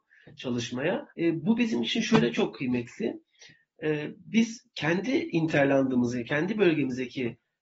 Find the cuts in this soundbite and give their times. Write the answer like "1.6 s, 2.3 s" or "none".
1.1 s